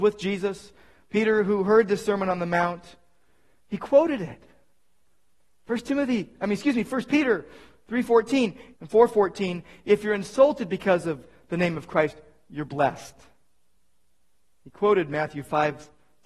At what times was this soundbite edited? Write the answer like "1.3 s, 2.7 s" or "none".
8.7 s